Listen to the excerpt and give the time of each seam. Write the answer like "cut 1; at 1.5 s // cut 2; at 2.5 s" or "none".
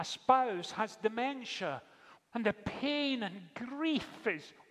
cut 1; at 2.2 s